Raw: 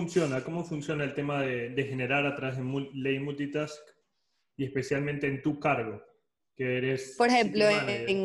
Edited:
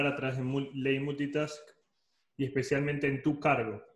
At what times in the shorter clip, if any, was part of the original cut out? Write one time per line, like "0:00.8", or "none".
none